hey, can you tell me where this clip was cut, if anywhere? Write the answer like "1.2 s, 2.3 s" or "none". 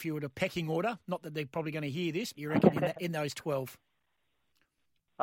2.3 s

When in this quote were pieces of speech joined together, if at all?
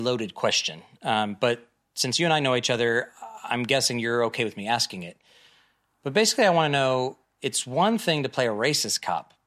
none

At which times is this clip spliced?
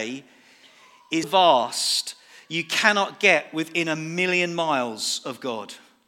1.2 s

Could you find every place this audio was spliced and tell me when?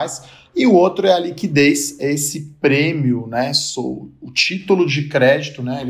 none

